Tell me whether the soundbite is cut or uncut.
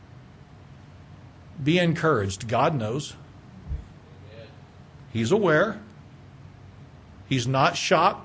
uncut